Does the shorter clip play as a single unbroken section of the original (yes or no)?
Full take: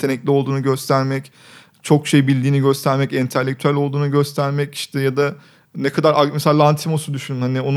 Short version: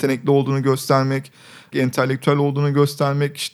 no